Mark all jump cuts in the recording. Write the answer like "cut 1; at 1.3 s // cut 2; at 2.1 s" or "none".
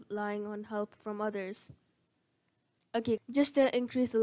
cut 1; at 3.2 s